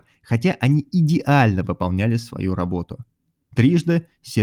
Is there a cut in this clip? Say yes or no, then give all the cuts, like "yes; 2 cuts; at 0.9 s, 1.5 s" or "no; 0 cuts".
yes; 1 cut; at 3.5 s